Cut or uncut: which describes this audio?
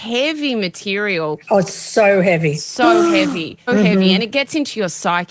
cut